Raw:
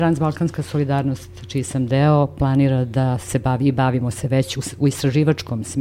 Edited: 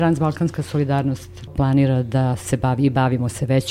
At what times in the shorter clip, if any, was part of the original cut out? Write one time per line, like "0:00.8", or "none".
0:01.5